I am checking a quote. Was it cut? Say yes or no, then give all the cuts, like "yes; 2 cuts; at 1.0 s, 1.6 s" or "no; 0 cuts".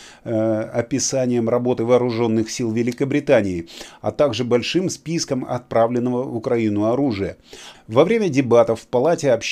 yes; 1 cut; at 7.7 s